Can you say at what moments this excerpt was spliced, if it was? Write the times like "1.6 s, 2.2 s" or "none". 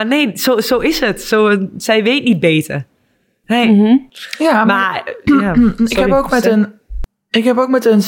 none

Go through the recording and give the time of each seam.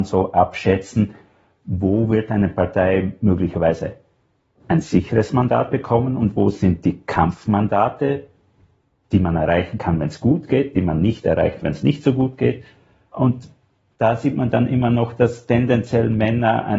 none

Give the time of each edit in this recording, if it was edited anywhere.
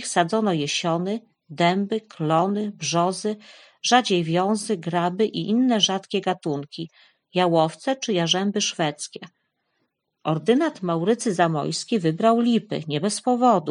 none

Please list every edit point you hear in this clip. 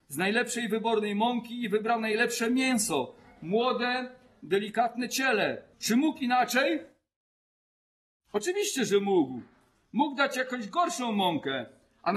5.7 s

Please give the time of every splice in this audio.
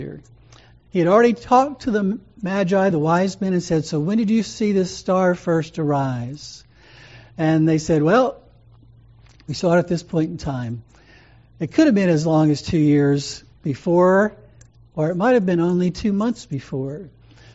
none

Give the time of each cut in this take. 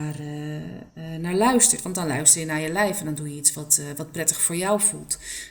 none

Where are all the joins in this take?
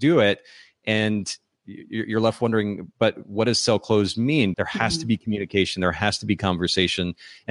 4.5 s

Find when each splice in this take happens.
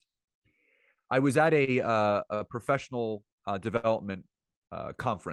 none

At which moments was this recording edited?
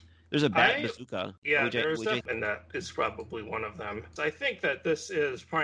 2.2 s, 4.2 s

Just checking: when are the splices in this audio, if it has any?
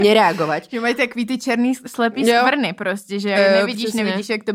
3.3 s

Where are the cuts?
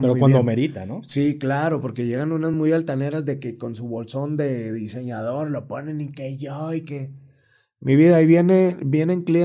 none

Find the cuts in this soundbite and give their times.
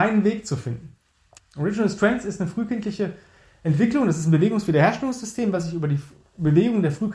1.4 s

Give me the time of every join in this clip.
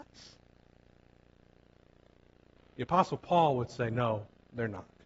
none

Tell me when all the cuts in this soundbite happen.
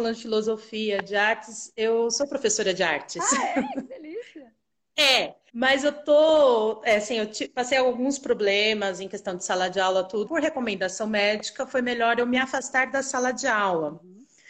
5.5 s, 10.3 s

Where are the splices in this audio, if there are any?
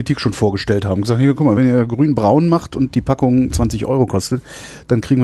none

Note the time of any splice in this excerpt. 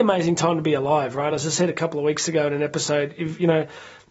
none

